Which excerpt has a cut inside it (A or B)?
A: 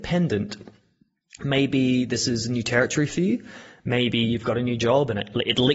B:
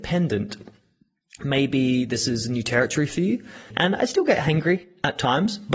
B